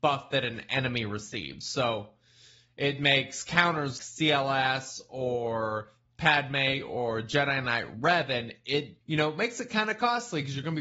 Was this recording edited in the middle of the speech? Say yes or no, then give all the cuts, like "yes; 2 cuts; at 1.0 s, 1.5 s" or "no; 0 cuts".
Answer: yes; 2 cuts; at 4.0 s, 9.0 s